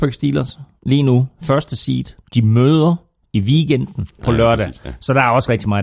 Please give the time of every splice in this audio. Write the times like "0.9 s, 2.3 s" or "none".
2.2 s, 4.2 s